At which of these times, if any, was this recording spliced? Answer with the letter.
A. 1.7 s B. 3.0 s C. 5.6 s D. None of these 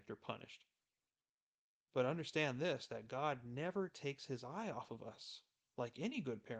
A